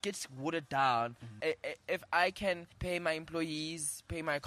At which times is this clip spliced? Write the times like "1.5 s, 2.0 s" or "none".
1.4 s, 2.7 s